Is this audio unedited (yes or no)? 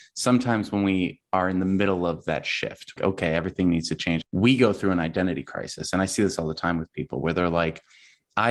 no